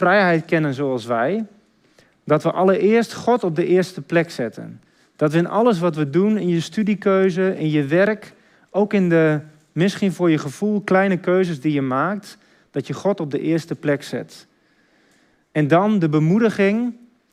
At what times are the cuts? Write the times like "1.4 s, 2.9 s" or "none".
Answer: none